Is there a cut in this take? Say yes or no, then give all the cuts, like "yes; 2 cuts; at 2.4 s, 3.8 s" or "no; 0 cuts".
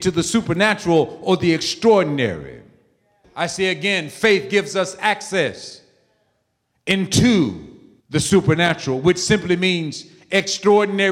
yes; 2 cuts; at 3.2 s, 8.0 s